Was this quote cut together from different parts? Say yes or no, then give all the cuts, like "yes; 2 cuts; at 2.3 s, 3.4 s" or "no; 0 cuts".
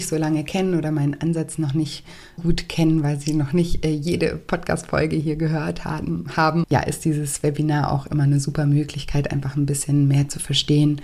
yes; 2 cuts; at 2.4 s, 6.6 s